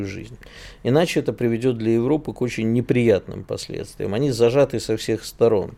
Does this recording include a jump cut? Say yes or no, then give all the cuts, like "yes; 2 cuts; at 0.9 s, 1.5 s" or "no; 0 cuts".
no; 0 cuts